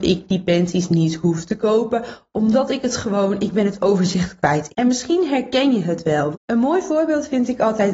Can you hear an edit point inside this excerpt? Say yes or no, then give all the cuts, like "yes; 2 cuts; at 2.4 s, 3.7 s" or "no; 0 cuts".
yes; 2 cuts; at 4.7 s, 6.3 s